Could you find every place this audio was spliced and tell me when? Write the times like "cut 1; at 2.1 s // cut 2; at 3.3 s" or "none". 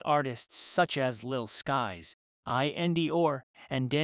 none

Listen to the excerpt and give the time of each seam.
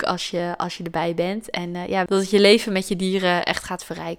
cut 1; at 2.1 s

